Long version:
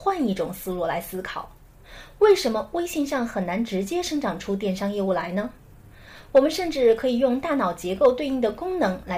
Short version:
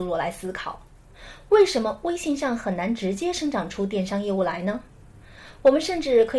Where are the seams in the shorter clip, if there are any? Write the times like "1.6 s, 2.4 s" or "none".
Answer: none